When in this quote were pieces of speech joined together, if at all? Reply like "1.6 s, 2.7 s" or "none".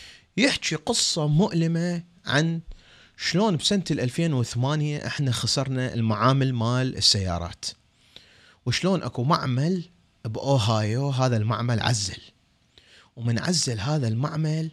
none